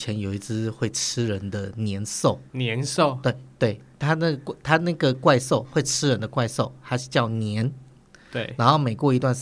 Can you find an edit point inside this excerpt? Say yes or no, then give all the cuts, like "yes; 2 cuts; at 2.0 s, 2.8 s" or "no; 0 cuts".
yes; 1 cut; at 2.5 s